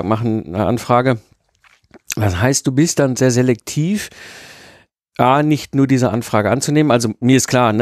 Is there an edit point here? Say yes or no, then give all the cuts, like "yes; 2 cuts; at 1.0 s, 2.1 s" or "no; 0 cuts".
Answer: no; 0 cuts